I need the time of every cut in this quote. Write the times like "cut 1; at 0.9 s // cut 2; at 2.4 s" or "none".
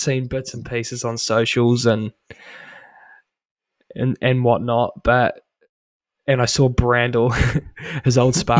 none